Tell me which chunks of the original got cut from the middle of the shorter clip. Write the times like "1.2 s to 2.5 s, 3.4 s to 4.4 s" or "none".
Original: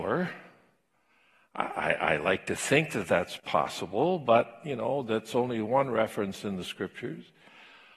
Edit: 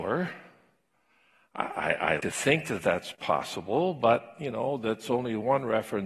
2.2 s to 2.5 s